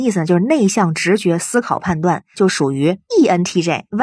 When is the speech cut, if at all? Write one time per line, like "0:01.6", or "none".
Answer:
0:02.3